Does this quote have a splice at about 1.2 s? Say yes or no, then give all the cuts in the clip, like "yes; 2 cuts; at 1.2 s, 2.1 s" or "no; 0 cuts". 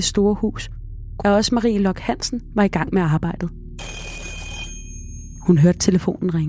yes; 1 cut; at 1.2 s